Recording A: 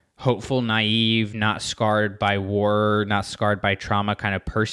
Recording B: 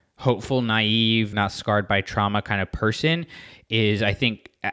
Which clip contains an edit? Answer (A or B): B